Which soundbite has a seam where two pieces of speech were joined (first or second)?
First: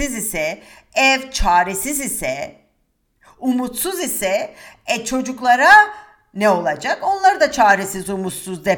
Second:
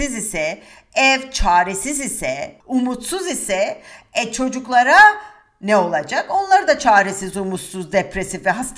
second